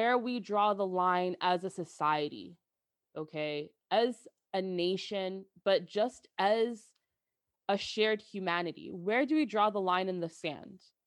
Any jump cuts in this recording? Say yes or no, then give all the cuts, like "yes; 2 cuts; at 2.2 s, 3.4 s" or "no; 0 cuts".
no; 0 cuts